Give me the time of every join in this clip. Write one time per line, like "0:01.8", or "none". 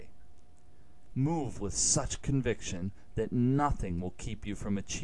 0:01.1